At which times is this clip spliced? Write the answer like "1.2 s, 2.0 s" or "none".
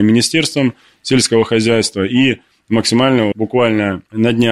3.3 s